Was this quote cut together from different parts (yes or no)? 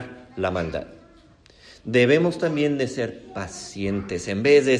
no